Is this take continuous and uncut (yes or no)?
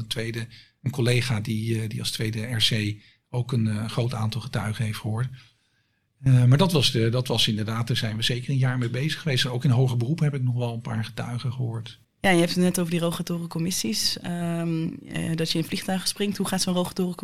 no